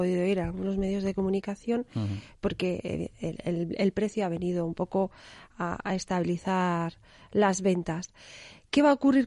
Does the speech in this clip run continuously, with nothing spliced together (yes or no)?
yes